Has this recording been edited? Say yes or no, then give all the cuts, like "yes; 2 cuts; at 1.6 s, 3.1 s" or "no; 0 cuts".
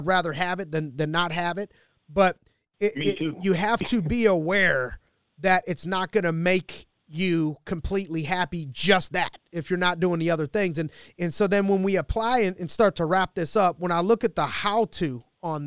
no; 0 cuts